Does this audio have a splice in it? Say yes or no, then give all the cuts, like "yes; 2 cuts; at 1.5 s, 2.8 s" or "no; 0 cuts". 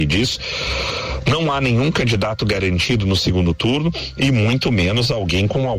no; 0 cuts